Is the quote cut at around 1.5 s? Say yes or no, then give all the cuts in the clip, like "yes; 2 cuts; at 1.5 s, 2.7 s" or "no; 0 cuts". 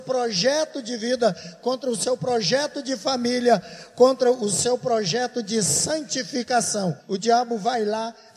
no; 1 cut; at 7.0 s